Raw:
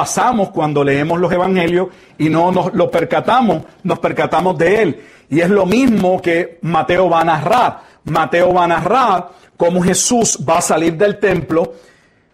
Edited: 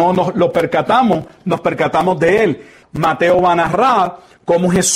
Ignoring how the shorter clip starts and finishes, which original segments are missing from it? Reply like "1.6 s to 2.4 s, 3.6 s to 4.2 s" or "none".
5.2 s to 7.9 s